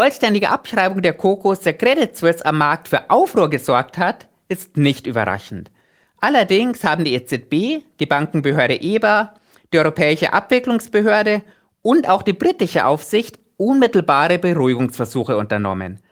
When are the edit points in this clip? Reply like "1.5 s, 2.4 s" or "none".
none